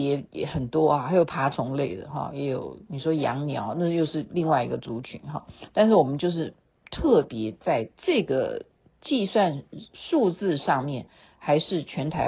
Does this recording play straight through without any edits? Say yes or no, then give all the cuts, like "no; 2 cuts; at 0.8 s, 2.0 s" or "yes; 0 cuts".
yes; 0 cuts